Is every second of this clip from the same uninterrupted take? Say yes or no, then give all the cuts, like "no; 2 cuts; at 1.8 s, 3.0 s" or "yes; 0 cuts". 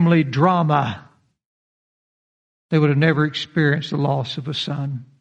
yes; 0 cuts